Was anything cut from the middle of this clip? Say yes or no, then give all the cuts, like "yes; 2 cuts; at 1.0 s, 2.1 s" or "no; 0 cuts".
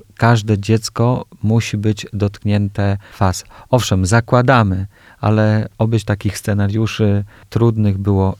no; 0 cuts